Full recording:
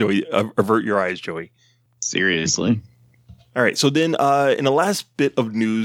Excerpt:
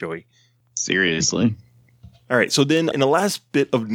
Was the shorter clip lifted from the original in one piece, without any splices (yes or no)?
no